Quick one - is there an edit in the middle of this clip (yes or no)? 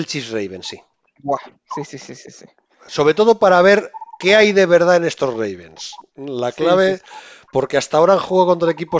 no